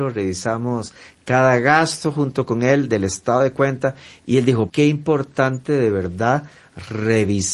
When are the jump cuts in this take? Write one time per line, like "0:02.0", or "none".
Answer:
0:04.7